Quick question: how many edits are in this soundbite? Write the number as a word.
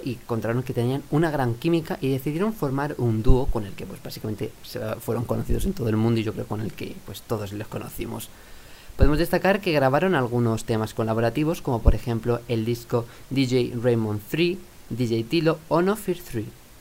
zero